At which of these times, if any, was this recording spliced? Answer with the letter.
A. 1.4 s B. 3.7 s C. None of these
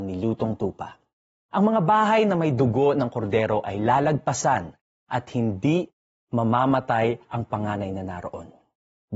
C